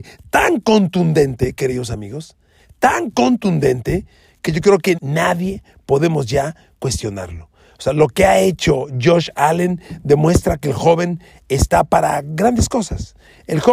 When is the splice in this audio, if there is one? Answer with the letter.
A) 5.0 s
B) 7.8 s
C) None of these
A